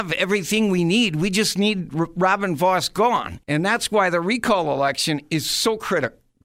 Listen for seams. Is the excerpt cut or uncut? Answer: cut